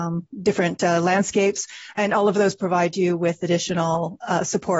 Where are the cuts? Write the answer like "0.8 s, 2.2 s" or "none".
none